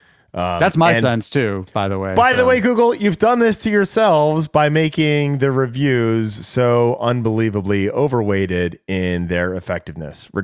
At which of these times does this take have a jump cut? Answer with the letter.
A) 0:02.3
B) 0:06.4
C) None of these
C